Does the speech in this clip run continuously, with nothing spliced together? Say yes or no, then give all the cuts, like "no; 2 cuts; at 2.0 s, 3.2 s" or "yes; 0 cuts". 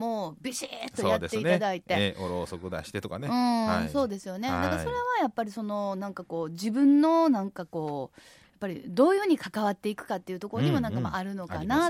yes; 0 cuts